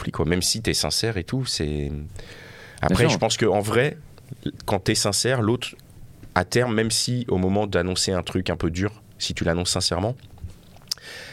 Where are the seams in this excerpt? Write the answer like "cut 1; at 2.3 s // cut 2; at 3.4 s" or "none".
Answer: none